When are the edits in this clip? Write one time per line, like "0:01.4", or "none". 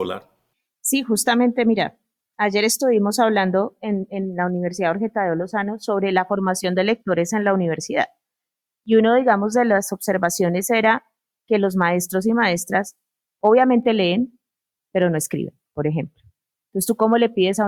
none